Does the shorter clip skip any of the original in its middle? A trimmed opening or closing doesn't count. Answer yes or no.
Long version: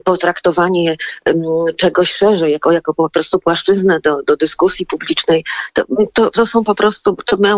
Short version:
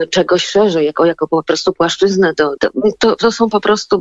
yes